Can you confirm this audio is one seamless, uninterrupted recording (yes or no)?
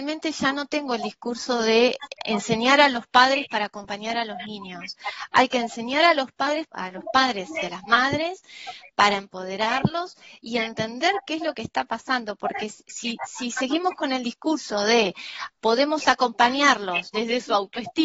no